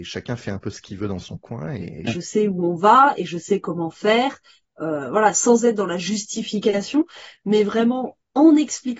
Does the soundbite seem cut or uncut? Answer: cut